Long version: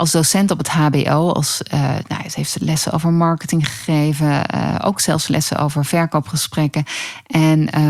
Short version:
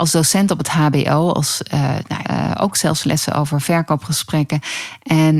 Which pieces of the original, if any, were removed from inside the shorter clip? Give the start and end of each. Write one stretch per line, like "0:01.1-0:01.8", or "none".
0:02.2-0:04.5